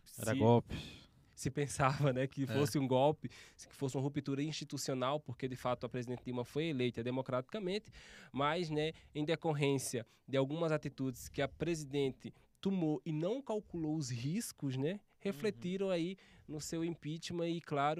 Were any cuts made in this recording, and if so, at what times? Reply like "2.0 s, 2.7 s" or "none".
none